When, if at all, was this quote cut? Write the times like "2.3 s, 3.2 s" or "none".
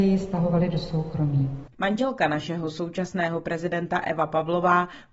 1.7 s